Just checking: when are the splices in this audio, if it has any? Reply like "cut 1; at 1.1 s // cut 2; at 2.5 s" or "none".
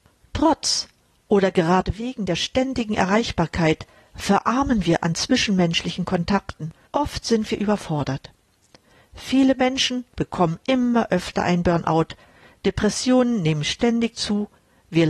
cut 1; at 6.9 s

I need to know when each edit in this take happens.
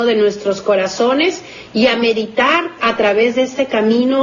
cut 1; at 2.8 s

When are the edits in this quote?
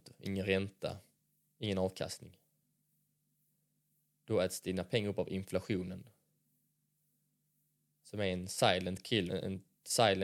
cut 1; at 9.3 s

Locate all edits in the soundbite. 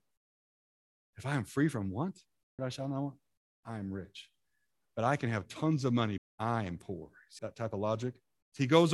cut 1; at 2.6 s // cut 2; at 6.2 s // cut 3; at 7.4 s

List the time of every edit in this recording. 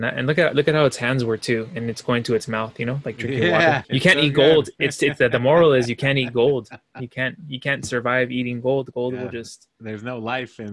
cut 1; at 3.8 s

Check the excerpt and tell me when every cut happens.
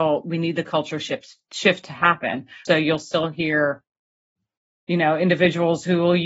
cut 1; at 2.7 s

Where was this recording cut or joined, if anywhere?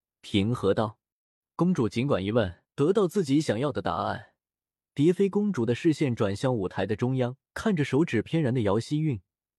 cut 1; at 2.6 s // cut 2; at 7.5 s

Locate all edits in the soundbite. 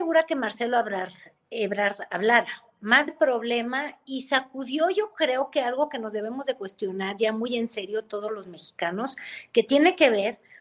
cut 1; at 3.1 s

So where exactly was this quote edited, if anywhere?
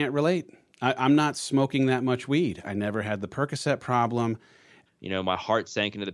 cut 1; at 2.6 s // cut 2; at 4.9 s

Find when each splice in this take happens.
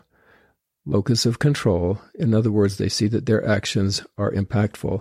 none

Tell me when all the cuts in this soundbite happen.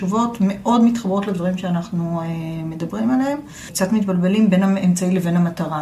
cut 1; at 3.7 s

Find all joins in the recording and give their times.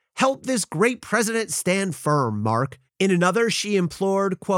cut 1; at 2.9 s

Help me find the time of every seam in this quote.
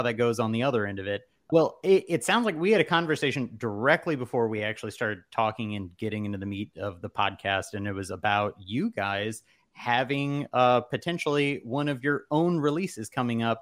none

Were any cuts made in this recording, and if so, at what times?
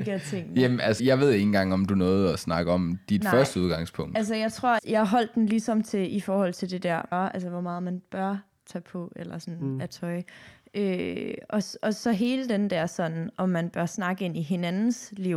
cut 1; at 1.0 s // cut 2; at 4.8 s // cut 3; at 7.1 s

